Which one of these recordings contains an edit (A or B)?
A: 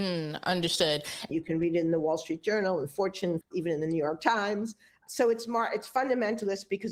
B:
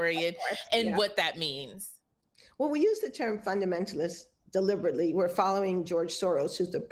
A